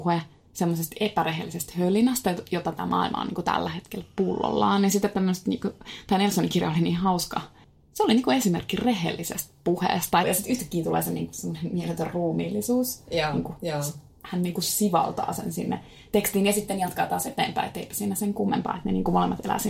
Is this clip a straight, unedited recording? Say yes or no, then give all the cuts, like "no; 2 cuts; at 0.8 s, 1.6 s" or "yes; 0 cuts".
no; 1 cut; at 10.2 s